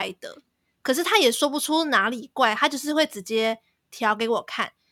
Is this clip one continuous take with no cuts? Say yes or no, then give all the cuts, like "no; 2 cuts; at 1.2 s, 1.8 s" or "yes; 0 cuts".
yes; 0 cuts